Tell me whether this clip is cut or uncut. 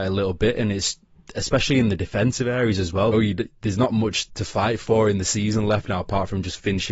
cut